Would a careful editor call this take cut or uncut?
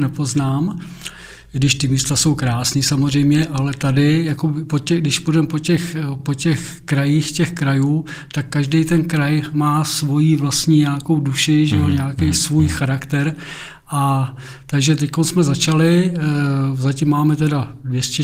uncut